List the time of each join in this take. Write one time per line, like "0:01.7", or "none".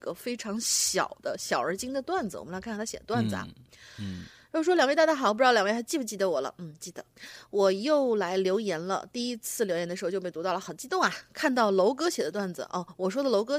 none